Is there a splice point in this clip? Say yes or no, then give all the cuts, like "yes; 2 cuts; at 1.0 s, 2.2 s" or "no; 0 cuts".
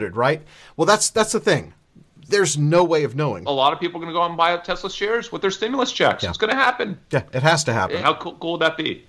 yes; 2 cuts; at 3.5 s, 8.0 s